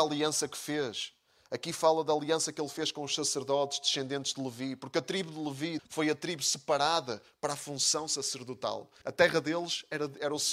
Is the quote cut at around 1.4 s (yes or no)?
no